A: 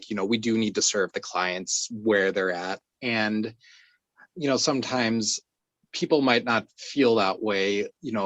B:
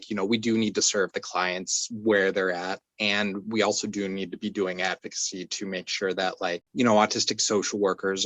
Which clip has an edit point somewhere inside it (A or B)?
A